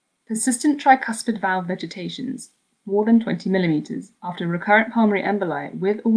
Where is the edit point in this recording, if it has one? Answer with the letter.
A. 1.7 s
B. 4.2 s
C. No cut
B